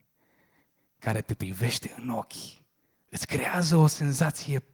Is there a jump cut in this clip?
yes; 1 cut; at 2.9 s

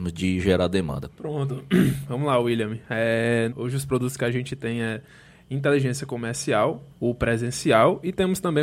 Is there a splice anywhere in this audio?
yes; 3 cuts; at 1.1 s, 3.5 s, 6.9 s

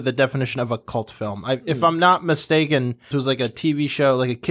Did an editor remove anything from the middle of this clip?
yes; 1 cut; at 3.1 s

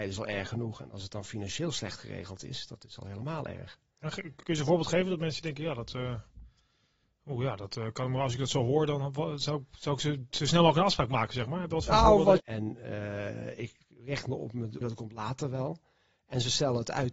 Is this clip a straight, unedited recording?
no; 2 cuts; at 12.4 s, 14.8 s

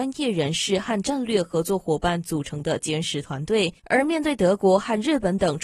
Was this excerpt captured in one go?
no; 1 cut; at 3.8 s

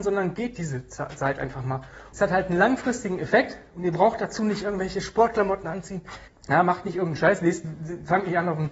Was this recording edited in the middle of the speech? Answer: yes; 2 cuts; at 2.1 s, 6.3 s

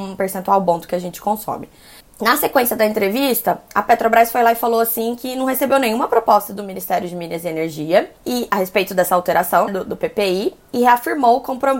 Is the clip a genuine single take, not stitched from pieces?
no; 3 cuts; at 2.0 s, 8.2 s, 9.7 s

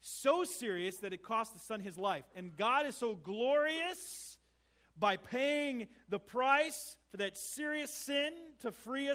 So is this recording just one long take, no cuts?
yes; 0 cuts

